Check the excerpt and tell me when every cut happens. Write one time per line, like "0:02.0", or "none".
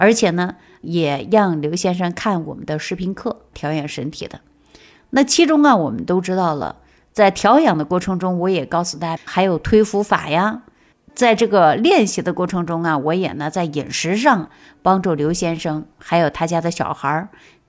0:09.2